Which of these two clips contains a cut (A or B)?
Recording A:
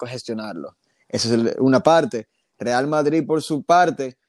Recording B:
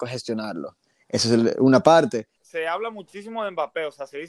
B